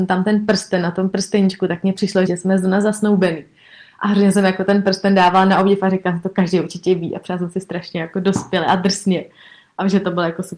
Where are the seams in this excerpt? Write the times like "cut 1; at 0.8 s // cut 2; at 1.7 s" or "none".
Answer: cut 1; at 2.3 s